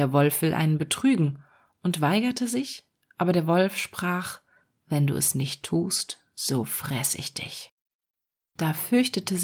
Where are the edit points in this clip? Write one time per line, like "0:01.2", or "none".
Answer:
none

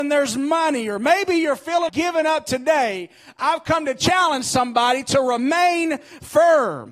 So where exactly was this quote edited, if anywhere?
0:01.9

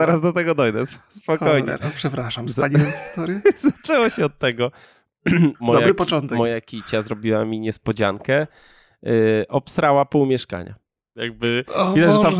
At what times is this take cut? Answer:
0:05.6
0:11.2

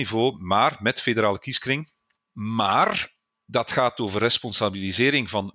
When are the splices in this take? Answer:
0:02.2

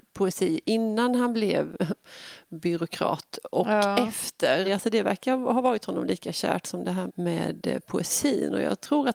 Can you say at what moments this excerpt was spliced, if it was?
0:04.6
0:07.1

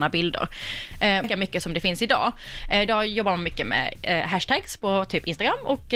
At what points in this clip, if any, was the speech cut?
0:01.2

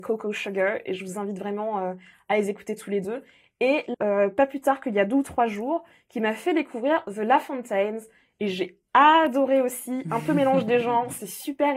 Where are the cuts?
0:03.9

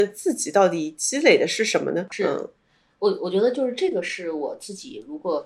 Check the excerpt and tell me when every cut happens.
0:02.1

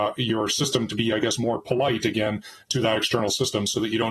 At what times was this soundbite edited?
none

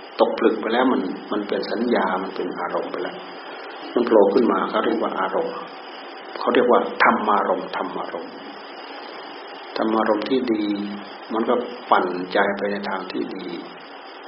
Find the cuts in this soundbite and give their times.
none

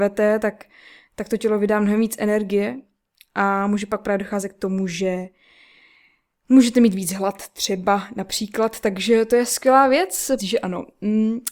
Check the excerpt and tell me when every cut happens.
0:10.4

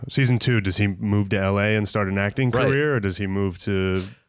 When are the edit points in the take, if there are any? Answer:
none

